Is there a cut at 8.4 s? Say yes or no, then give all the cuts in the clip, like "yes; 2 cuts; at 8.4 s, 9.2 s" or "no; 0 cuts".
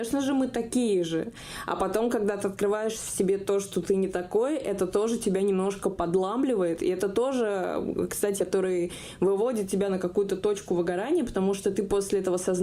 yes; 1 cut; at 8.4 s